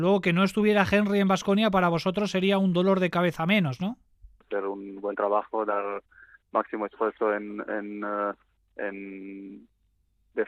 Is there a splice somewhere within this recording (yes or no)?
yes